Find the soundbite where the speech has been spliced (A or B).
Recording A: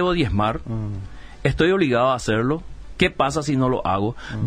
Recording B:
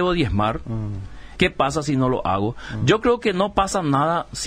B